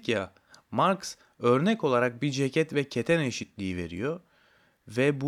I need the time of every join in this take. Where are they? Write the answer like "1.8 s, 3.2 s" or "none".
none